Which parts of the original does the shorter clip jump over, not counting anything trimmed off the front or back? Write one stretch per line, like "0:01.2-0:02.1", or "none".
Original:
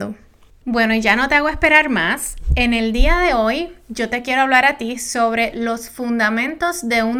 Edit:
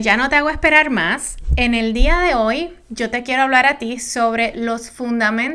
none